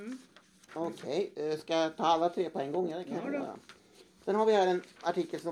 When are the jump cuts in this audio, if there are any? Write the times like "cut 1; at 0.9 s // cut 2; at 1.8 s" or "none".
none